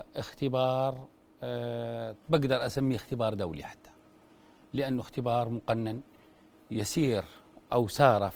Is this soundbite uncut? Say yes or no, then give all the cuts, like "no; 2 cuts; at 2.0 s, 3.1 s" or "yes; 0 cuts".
no; 1 cut; at 2.2 s